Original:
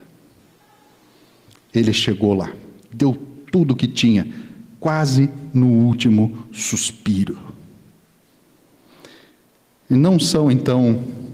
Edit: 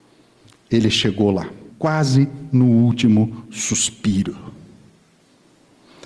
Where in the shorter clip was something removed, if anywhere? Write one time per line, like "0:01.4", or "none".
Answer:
0:01.7